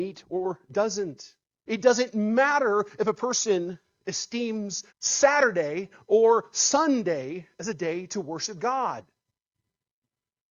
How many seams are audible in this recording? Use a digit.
2